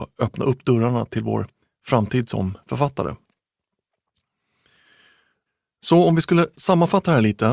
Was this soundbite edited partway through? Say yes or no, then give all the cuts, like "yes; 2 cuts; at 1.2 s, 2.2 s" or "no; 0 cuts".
no; 0 cuts